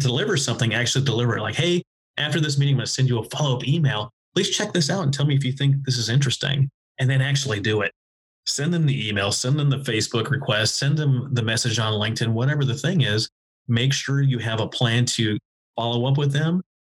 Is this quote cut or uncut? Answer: uncut